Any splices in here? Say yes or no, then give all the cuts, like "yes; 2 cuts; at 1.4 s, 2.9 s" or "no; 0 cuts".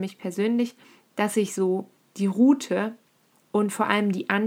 no; 0 cuts